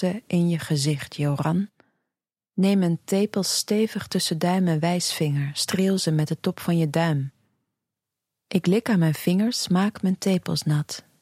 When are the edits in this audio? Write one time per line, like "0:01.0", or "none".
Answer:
none